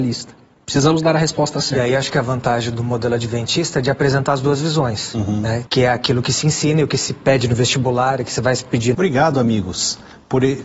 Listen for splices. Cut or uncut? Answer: cut